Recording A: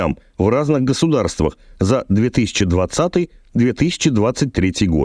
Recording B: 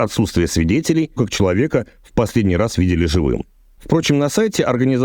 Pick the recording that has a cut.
B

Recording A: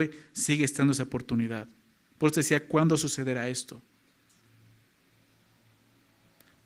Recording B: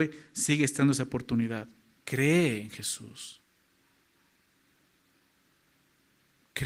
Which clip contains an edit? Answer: B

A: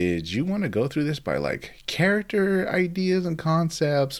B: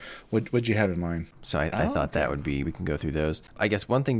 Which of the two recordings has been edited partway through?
B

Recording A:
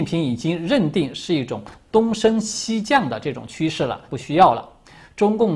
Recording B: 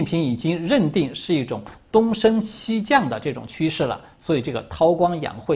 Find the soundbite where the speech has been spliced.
A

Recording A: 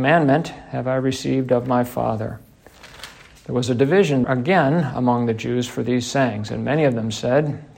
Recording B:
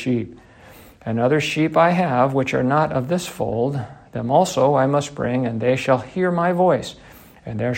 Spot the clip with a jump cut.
A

